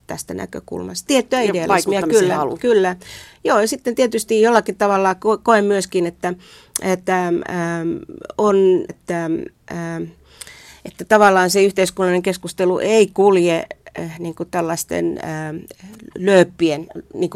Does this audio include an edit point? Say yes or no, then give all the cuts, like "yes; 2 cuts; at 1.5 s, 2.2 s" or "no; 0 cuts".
yes; 2 cuts; at 1.1 s, 8.9 s